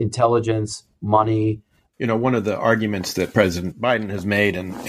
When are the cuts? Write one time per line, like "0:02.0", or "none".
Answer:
0:01.9